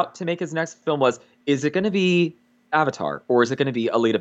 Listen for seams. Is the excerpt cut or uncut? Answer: uncut